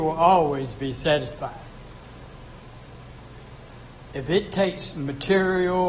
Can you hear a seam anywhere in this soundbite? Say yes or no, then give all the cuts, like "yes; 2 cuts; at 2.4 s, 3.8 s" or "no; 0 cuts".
no; 0 cuts